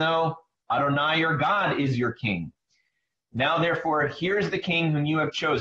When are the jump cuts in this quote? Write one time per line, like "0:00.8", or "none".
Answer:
none